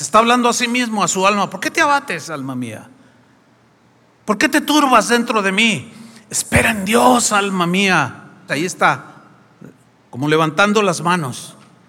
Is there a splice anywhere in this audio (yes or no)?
yes